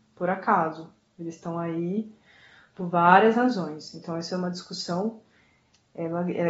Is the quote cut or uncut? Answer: uncut